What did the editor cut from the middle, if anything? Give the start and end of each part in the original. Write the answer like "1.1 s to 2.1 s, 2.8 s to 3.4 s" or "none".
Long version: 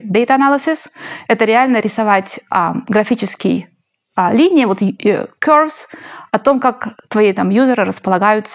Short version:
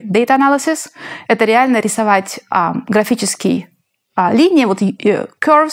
none